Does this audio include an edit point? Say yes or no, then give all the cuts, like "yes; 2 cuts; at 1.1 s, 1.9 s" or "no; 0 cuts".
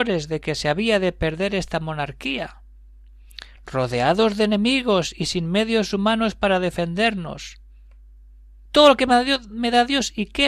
yes; 1 cut; at 8.7 s